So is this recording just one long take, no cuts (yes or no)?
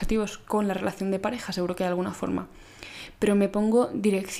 yes